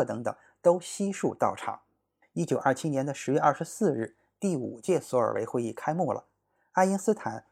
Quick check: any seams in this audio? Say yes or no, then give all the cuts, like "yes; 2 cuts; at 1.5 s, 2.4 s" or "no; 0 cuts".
no; 0 cuts